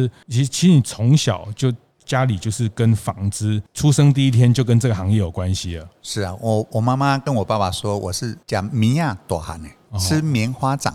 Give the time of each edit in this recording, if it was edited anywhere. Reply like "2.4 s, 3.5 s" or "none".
none

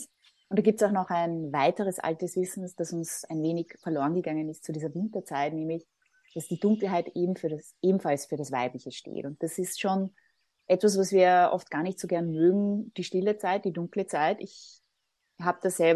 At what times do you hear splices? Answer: none

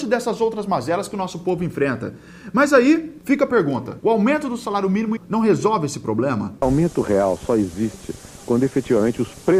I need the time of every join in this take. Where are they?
5.2 s, 6.6 s

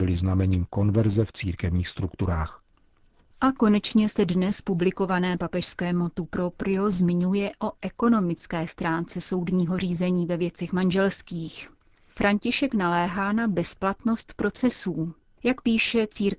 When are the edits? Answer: none

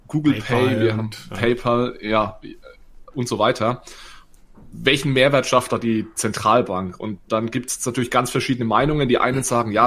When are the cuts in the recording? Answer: none

